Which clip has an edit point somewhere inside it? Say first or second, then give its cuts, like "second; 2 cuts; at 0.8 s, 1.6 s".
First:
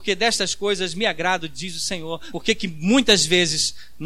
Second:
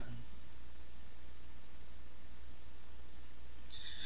first; 1 cut; at 2.3 s